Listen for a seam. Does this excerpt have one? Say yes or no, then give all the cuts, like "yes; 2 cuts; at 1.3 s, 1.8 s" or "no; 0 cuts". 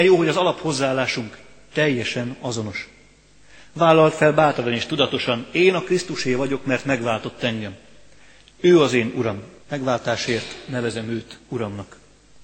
yes; 1 cut; at 9.6 s